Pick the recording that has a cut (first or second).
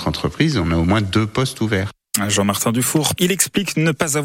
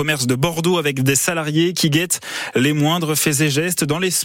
first